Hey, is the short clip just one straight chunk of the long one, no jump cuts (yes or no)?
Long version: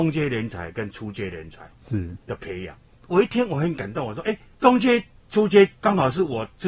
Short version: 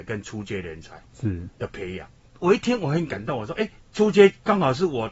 no